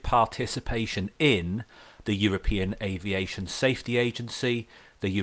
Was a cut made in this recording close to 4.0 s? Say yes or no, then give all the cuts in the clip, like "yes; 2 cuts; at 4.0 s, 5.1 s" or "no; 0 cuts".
no; 1 cut; at 2.0 s